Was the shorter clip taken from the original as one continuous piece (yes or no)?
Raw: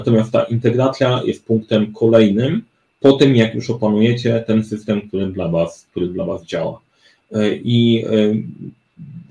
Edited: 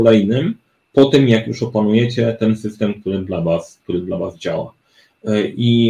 yes